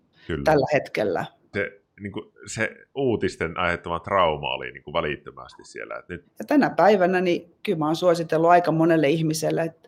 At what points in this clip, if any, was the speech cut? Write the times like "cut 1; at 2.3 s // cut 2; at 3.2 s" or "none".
cut 1; at 1.5 s // cut 2; at 6.2 s